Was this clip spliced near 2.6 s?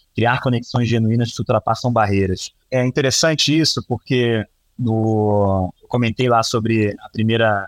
yes; 1 cut; at 2.6 s

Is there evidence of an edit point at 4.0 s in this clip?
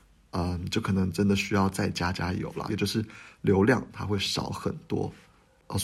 no; 1 cut; at 2.7 s

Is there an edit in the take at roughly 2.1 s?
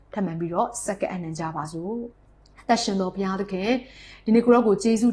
yes; 1 cut; at 2.1 s

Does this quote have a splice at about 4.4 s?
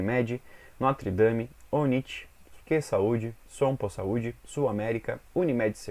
no; 1 cut; at 2.6 s

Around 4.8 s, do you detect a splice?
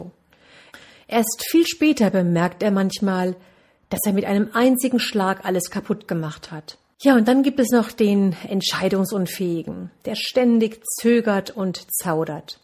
no; 1 cut; at 6.9 s

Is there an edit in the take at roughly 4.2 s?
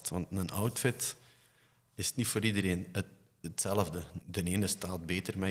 yes; 1 cut; at 4.2 s

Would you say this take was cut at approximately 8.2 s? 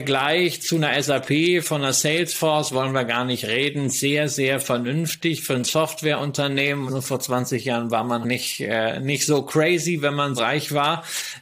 yes; 3 cuts; at 6.9 s, 8.2 s, 10.4 s

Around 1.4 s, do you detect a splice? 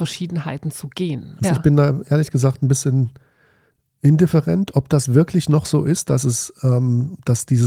yes; 1 cut; at 1.4 s

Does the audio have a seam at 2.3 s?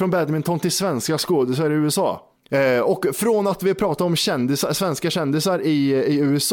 yes; 1 cut; at 2.3 s

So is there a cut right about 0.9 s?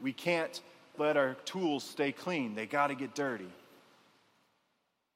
yes; 1 cut; at 0.9 s

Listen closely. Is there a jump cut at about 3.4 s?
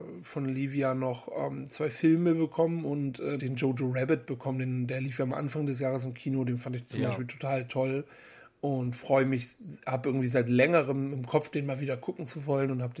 yes; 1 cut; at 3.4 s

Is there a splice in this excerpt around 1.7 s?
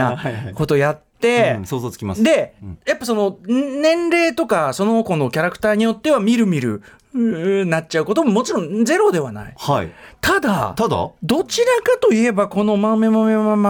no; 0 cuts

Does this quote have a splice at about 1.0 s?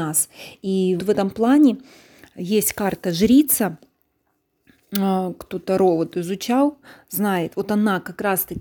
yes; 1 cut; at 1.0 s

